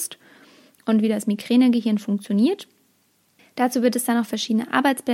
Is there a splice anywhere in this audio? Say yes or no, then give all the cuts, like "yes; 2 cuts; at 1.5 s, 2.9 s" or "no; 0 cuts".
yes; 1 cut; at 3.4 s